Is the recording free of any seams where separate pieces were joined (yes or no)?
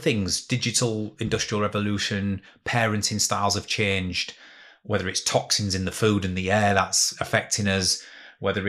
yes